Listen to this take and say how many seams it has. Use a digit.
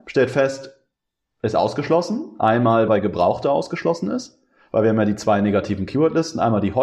1